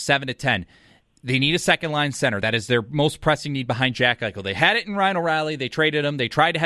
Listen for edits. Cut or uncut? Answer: uncut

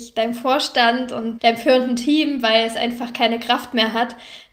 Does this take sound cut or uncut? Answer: cut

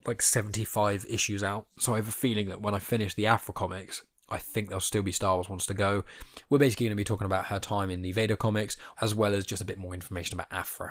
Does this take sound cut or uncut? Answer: cut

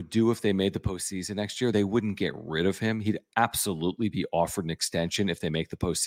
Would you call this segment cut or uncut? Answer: uncut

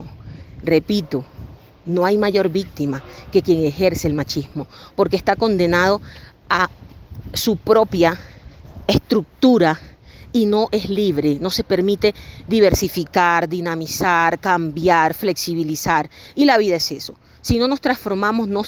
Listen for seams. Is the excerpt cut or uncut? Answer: uncut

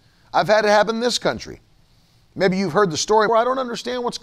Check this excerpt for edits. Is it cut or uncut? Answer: cut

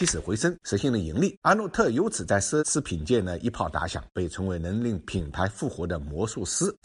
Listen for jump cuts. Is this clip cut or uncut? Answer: uncut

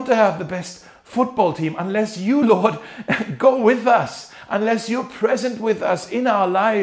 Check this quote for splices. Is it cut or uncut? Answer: uncut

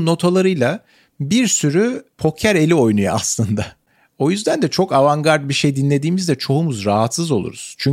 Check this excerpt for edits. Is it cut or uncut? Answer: uncut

